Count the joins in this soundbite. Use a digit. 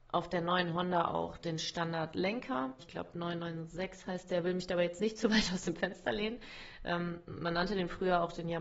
1